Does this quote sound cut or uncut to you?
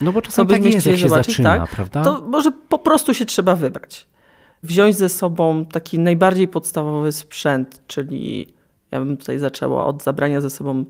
uncut